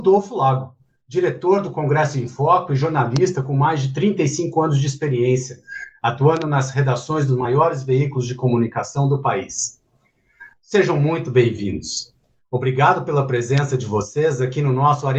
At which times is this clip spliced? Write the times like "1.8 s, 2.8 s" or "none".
none